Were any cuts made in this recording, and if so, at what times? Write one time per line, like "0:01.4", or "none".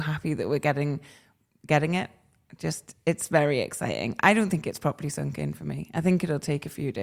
none